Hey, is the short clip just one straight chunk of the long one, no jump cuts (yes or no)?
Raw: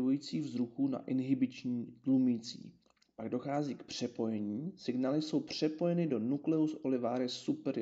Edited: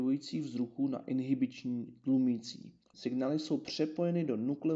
no